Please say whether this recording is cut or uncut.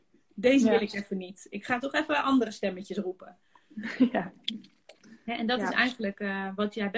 uncut